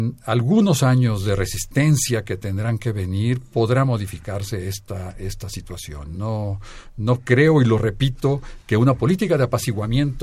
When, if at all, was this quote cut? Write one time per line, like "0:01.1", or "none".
none